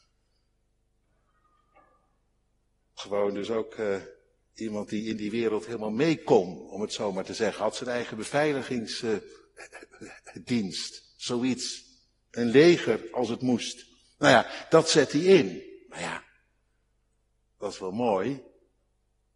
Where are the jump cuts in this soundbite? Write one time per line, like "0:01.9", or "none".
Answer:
none